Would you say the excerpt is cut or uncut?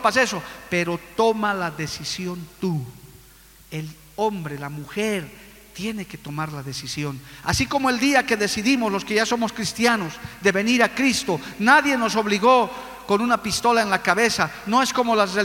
uncut